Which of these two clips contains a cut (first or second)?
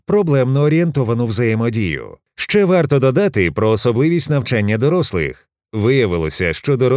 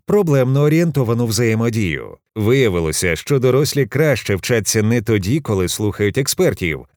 second